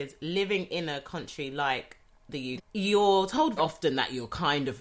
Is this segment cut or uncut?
cut